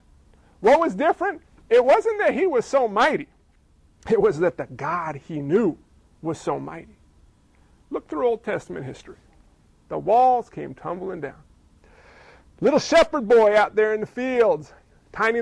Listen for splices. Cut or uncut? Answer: cut